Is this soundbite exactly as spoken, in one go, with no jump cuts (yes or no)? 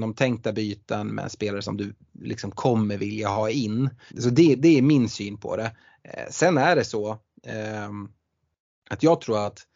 no